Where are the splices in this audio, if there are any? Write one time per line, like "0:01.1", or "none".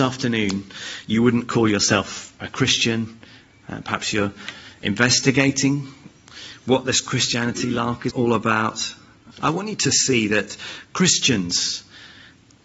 0:08.1
0:09.3